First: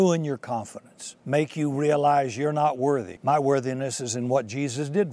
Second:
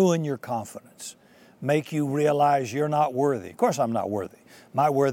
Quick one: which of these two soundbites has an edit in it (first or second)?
first